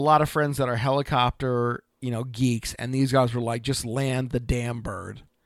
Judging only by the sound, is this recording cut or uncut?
uncut